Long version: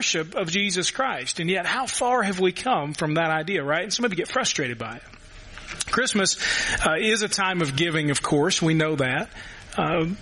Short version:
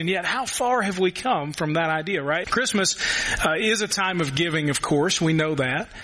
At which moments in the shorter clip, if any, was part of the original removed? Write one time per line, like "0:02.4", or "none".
0:02.4